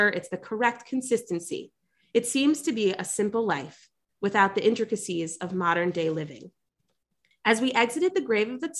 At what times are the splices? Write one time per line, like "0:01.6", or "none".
0:02.0
0:07.3